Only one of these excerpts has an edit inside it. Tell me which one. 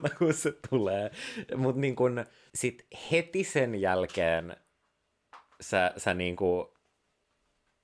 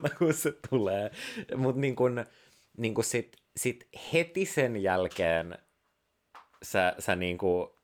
first; 1 cut; at 2.5 s

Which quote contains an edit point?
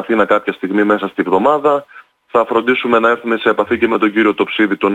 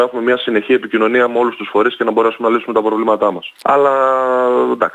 second; 1 cut; at 3.6 s

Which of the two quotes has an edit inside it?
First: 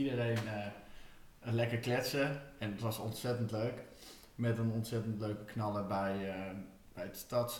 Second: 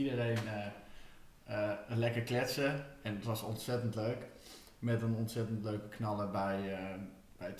first; 1 cut; at 1.4 s

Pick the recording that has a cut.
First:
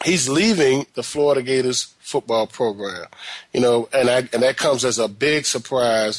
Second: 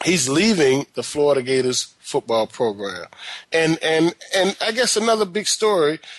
second; 1 cut; at 3.4 s

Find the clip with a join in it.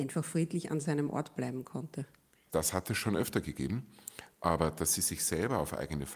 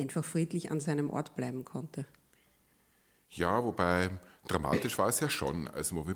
first; 1 cut; at 2.5 s

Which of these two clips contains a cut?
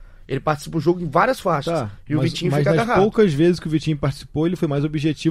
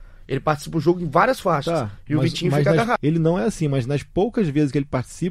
second; 1 cut; at 3.0 s

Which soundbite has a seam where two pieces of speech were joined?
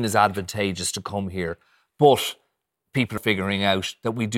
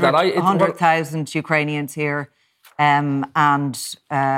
first; 1 cut; at 3.2 s

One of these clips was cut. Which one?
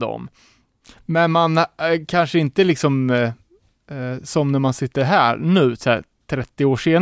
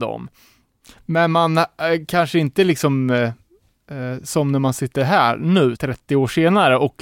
second; 1 cut; at 5.8 s

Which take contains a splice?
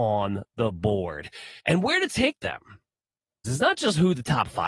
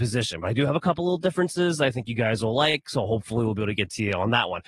first; 2 cuts; at 1.6 s, 3.4 s

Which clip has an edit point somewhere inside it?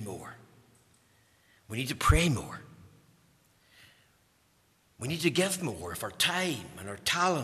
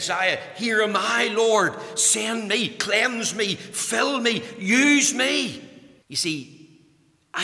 second; 1 cut; at 6.0 s

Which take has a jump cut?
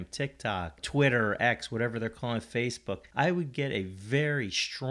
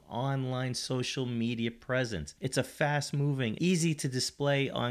second; 2 cuts; at 2.4 s, 3.6 s

